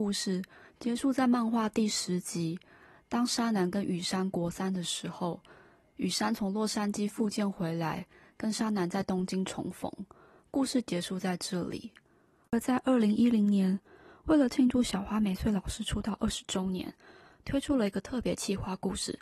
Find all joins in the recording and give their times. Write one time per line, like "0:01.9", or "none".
none